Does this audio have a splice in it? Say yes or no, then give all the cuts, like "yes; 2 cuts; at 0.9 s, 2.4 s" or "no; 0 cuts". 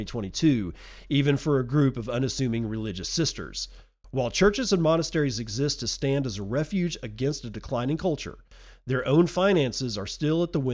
no; 0 cuts